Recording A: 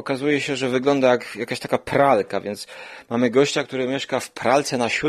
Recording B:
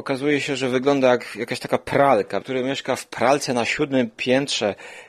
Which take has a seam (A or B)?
B